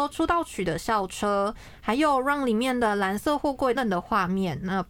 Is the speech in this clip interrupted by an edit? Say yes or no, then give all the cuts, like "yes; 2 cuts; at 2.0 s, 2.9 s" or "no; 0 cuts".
yes; 2 cuts; at 1.8 s, 3.8 s